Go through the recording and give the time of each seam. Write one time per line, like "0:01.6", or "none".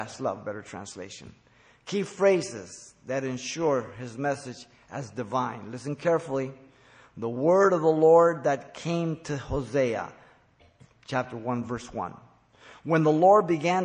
none